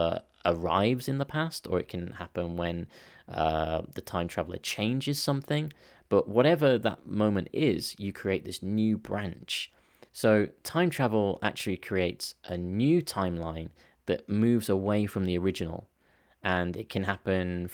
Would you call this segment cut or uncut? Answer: cut